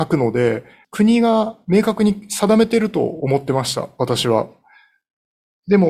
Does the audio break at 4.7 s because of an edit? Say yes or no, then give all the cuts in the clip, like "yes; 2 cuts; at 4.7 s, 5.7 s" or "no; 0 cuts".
no; 0 cuts